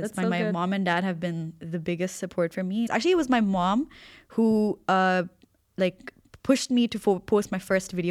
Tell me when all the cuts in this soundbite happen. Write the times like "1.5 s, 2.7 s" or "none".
2.9 s